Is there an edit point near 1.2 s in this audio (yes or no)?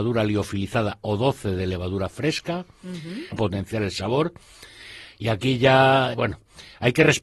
no